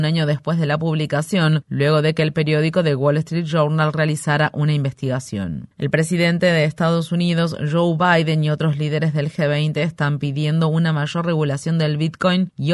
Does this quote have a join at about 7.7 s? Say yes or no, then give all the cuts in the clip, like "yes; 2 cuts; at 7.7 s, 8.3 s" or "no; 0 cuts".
no; 0 cuts